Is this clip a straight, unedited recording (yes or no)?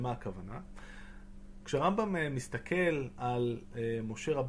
no